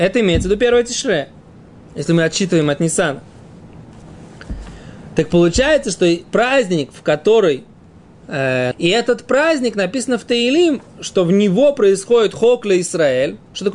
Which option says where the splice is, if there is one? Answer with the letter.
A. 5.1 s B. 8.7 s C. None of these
B